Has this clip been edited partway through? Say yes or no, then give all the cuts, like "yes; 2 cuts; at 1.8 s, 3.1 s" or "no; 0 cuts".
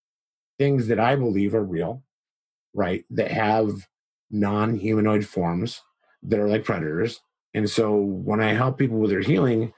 no; 0 cuts